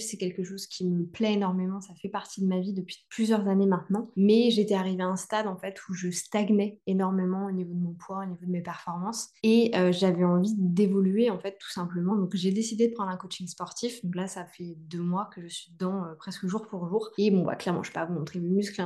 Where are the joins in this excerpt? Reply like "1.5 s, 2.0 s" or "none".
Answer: none